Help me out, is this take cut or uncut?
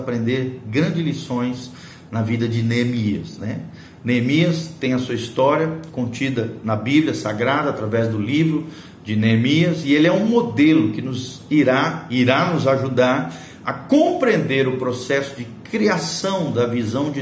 uncut